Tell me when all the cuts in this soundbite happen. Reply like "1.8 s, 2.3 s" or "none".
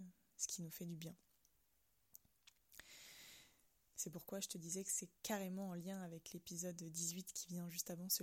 3.9 s, 5.2 s